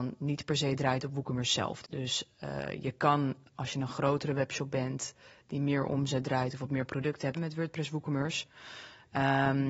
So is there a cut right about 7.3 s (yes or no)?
yes